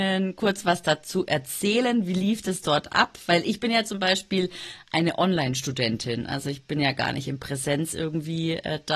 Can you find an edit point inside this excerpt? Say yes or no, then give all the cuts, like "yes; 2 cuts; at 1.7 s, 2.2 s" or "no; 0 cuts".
no; 0 cuts